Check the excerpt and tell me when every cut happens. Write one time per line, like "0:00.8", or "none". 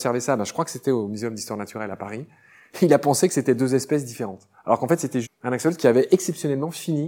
0:05.2